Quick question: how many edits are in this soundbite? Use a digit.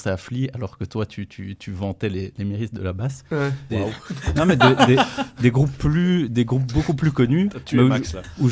1